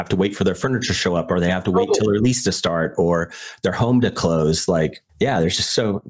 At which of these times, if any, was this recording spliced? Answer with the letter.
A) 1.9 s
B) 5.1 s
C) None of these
B